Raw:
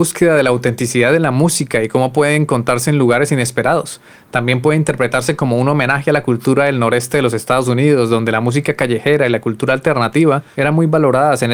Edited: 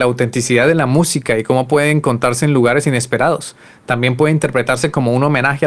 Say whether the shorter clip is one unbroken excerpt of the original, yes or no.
yes